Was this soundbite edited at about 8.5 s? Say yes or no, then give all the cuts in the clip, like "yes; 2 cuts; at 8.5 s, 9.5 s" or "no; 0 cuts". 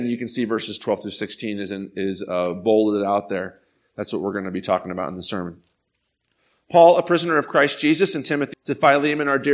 yes; 1 cut; at 8.5 s